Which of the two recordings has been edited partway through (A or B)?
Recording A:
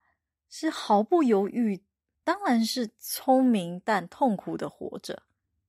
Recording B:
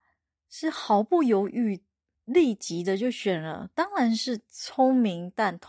A